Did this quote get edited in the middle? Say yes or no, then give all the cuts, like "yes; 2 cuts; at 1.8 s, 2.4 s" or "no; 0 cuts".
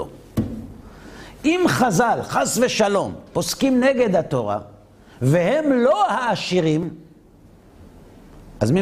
no; 0 cuts